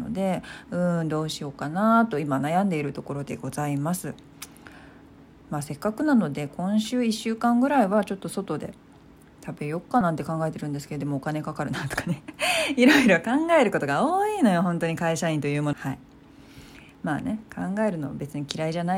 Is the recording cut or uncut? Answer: cut